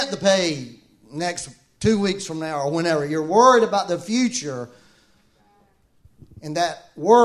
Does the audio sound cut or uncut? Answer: uncut